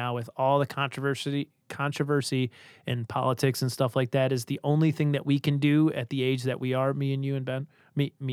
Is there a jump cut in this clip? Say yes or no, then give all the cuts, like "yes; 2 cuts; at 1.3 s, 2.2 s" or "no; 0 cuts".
no; 0 cuts